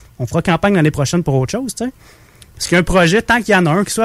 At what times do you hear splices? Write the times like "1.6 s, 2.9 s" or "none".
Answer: none